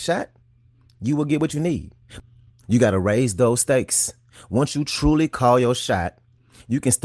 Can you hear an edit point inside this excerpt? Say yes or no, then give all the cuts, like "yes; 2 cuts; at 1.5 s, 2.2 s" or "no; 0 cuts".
yes; 1 cut; at 2.5 s